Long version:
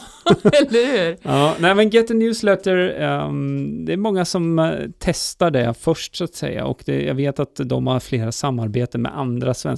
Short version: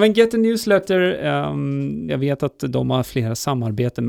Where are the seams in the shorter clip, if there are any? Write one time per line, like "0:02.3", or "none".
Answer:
0:02.1